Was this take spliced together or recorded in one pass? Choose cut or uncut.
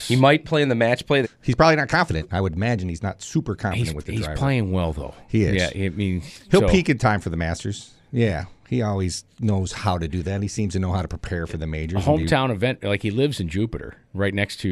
cut